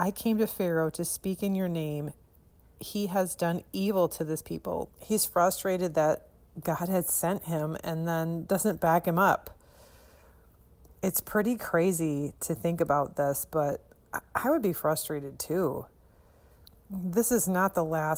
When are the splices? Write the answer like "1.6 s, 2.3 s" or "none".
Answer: 4.9 s